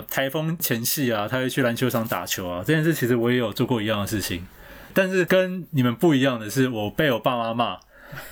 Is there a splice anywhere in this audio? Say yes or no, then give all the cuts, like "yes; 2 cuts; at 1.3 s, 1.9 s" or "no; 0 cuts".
no; 0 cuts